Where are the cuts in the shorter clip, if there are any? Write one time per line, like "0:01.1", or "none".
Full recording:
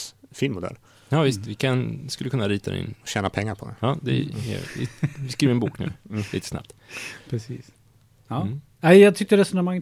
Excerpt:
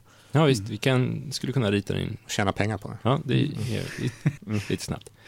0:04.4